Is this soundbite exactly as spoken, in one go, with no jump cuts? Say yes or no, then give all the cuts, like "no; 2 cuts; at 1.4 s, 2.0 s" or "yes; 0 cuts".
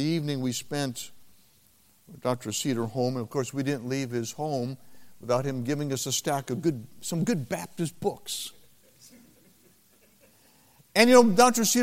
yes; 0 cuts